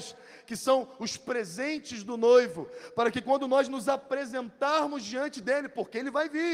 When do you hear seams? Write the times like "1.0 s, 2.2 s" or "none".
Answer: none

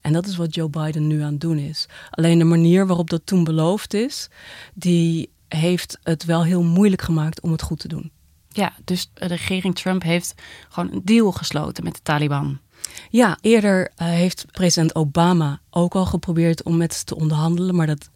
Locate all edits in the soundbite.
none

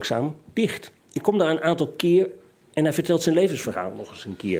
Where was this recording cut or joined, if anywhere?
1.0 s

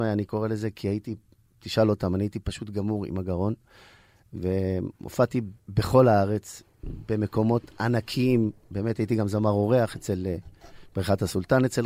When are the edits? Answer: 5.6 s

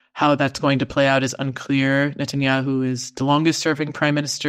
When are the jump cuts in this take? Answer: none

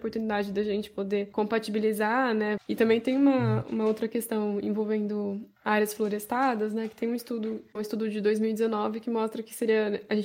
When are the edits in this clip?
2.6 s

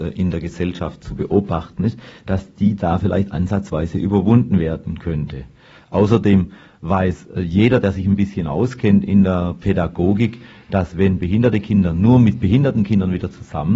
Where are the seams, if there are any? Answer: none

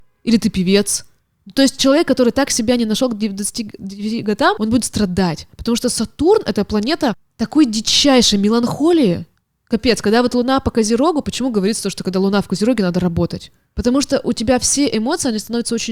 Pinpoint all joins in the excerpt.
none

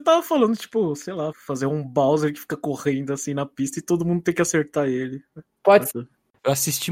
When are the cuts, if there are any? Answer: 1.3 s, 5.9 s

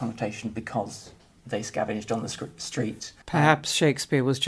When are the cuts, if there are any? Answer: 3.2 s

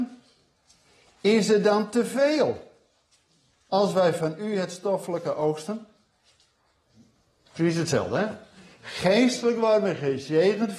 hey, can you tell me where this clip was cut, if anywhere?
none

